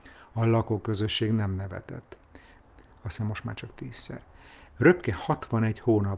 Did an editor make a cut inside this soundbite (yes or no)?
yes